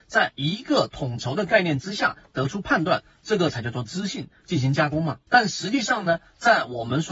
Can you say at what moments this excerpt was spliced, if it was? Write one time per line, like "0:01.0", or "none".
0:05.3